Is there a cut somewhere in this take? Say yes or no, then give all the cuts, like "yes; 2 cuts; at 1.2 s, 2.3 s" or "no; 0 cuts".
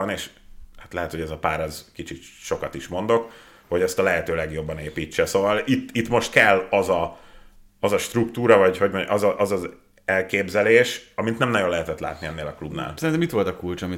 no; 0 cuts